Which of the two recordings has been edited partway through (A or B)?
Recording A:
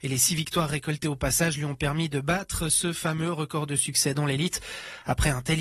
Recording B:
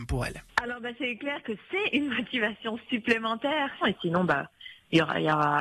B